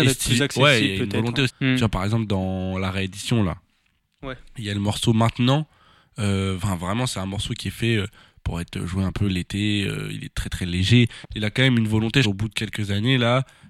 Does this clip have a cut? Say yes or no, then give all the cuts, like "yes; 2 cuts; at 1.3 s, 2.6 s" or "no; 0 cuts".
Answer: yes; 3 cuts; at 1.5 s, 11.2 s, 12.2 s